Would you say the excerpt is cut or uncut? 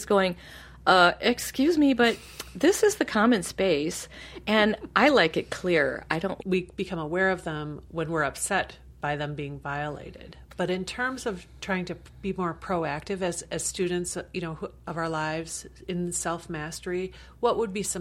cut